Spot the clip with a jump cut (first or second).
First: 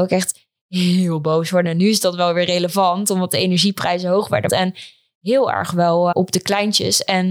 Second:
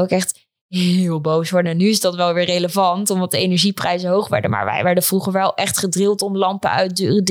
first